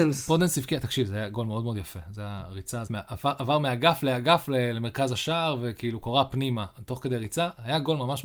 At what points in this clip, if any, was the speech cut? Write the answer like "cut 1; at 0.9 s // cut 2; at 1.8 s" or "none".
cut 1; at 2.9 s